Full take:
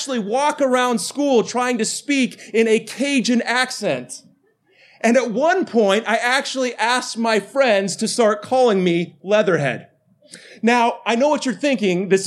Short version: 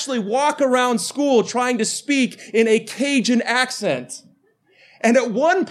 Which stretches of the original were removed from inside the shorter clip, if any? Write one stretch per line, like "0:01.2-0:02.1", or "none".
none